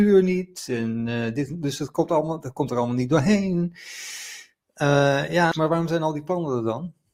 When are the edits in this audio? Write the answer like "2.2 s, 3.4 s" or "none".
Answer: 5.5 s